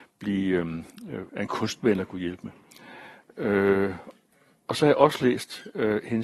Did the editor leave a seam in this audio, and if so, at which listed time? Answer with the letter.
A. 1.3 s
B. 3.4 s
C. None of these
A